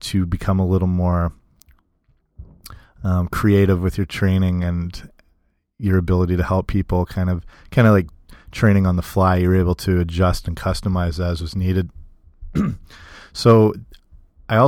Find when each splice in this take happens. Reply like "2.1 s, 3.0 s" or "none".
none